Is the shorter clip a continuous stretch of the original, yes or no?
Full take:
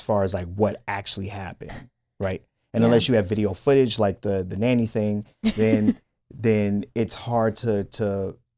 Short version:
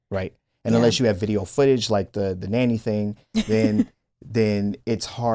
yes